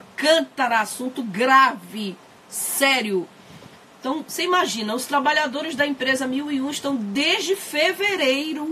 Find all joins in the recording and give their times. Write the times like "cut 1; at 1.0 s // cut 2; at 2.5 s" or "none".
none